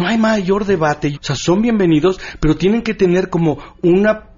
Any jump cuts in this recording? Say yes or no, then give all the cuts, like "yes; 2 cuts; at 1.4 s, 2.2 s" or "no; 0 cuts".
yes; 1 cut; at 1.1 s